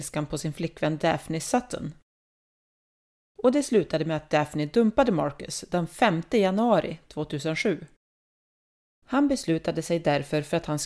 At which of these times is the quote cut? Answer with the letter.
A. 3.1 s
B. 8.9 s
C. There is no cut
B